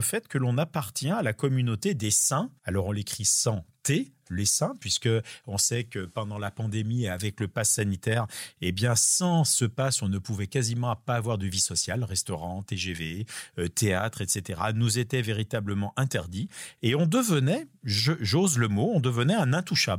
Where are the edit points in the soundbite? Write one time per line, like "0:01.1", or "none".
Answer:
0:02.6